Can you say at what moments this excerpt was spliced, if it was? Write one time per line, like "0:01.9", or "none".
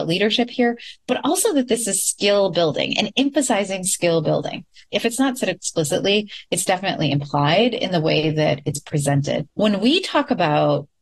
0:04.9